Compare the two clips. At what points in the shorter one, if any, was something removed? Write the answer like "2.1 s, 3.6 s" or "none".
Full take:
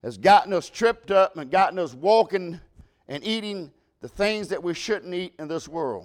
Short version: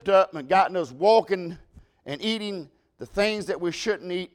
none